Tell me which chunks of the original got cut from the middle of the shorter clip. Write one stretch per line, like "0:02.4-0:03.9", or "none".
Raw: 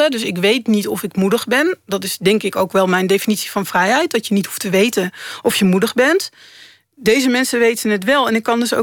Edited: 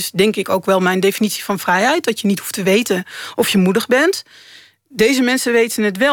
none